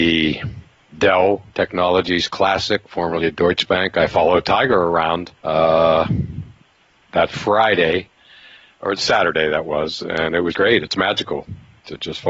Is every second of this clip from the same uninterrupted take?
no; 2 cuts; at 5.4 s, 10.5 s

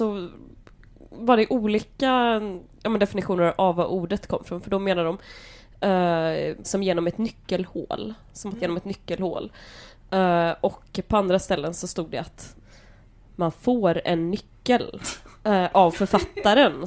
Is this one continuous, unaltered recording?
no; 2 cuts; at 6.6 s, 8.6 s

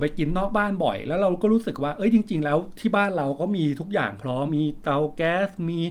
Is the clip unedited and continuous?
no; 1 cut; at 4.5 s

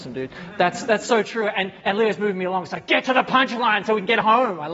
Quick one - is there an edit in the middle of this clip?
no; 0 cuts

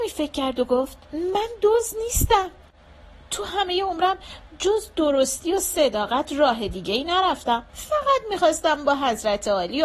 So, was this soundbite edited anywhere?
yes; 2 cuts; at 1.0 s, 7.7 s

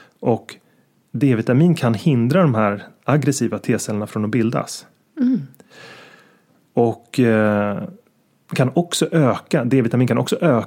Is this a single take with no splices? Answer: yes; 0 cuts

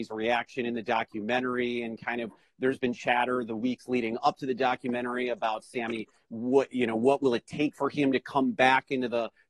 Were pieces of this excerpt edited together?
no; 0 cuts

